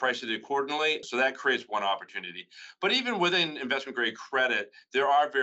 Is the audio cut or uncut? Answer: cut